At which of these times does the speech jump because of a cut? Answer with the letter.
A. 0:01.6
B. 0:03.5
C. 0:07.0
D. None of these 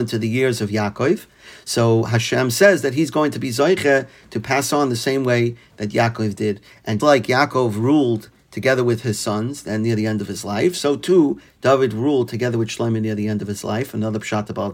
C